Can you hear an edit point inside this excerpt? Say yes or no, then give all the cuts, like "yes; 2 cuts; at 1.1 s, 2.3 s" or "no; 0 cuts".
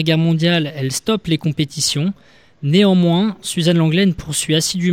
no; 0 cuts